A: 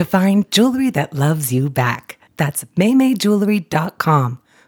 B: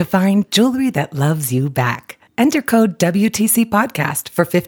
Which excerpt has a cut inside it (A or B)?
A